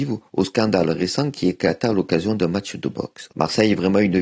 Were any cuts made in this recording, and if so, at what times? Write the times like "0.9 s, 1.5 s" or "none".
3.3 s